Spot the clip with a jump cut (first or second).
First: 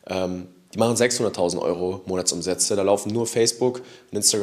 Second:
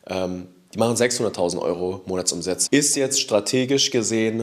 second